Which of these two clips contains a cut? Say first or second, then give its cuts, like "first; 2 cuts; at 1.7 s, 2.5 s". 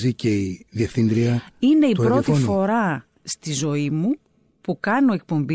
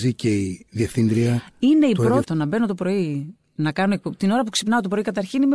second; 1 cut; at 2.2 s